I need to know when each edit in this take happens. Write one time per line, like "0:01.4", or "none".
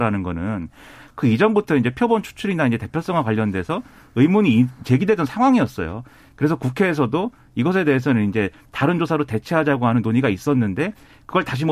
none